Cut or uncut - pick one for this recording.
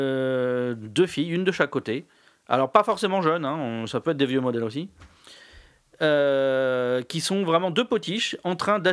uncut